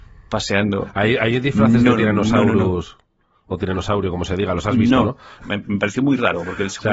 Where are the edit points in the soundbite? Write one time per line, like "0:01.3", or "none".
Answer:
0:05.4